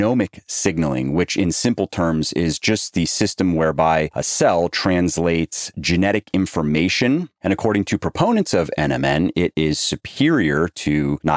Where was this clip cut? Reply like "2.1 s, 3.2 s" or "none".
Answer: 7.4 s